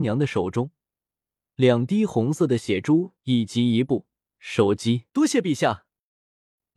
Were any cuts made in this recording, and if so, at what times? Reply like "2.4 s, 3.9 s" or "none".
5.1 s